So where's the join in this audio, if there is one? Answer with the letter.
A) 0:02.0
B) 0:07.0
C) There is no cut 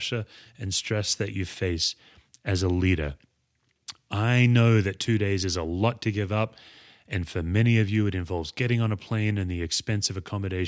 C